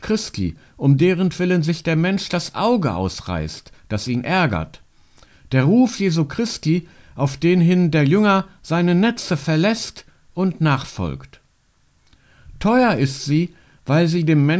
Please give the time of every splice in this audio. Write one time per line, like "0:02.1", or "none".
none